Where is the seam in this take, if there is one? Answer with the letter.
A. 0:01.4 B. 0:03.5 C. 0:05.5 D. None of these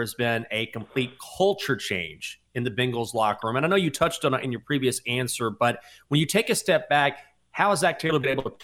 D